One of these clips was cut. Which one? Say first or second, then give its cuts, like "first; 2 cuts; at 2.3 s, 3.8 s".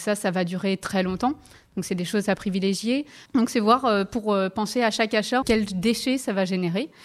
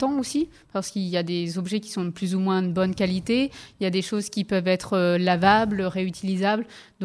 first; 2 cuts; at 3.3 s, 5.4 s